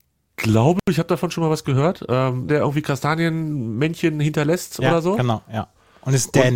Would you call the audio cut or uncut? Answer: cut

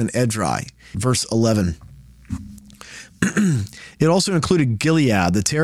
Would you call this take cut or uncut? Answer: cut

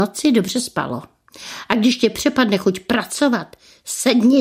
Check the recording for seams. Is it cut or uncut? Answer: uncut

